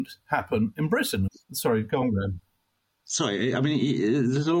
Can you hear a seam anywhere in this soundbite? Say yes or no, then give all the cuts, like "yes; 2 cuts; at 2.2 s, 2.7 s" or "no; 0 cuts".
yes; 1 cut; at 1.3 s